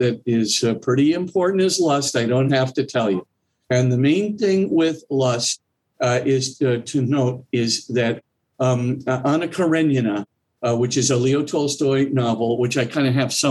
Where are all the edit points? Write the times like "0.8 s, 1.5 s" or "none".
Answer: none